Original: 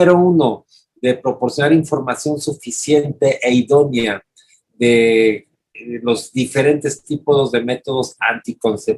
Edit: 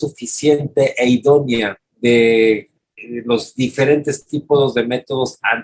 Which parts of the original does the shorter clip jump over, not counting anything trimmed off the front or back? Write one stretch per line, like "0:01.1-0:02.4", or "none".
0:04.3-0:04.6